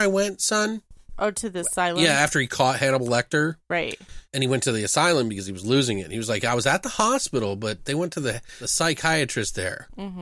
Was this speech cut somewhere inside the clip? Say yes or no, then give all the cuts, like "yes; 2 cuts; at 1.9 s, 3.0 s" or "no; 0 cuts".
no; 0 cuts